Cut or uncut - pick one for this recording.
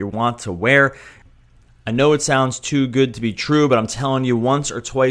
uncut